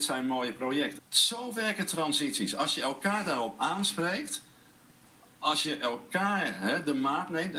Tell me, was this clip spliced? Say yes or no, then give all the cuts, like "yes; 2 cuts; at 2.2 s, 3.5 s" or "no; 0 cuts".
yes; 1 cut; at 1.0 s